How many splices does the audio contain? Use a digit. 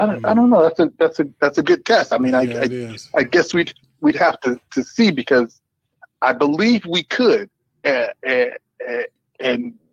0